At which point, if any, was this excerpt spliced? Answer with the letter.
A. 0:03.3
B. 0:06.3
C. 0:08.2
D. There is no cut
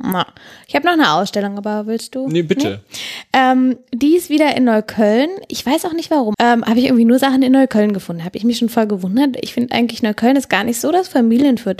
B